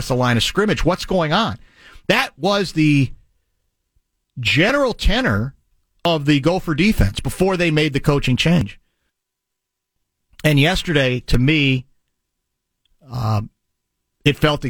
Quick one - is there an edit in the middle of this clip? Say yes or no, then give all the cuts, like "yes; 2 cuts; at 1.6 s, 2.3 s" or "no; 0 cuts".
no; 0 cuts